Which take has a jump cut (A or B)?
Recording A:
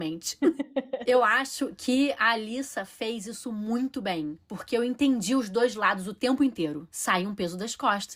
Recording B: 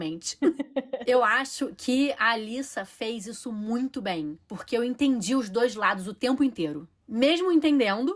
A